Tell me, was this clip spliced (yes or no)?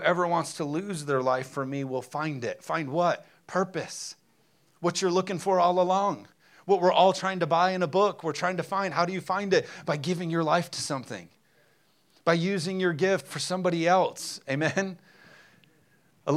no